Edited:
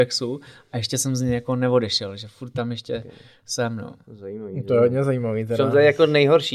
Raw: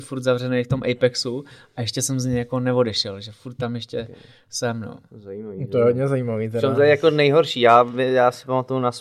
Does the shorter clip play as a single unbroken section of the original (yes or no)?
yes